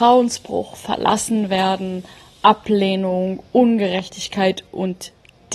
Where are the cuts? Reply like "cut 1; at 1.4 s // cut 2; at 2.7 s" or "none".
none